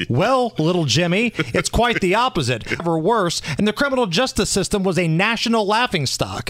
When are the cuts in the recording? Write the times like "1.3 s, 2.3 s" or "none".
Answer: 2.8 s